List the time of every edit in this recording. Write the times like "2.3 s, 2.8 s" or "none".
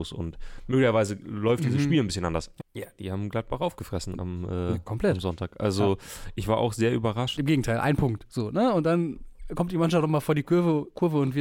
2.6 s, 7.4 s